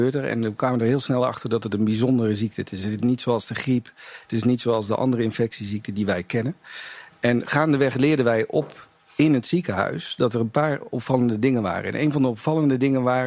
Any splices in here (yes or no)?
no